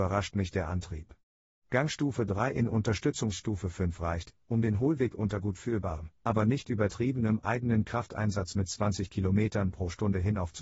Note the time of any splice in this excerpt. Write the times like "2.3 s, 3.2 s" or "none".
none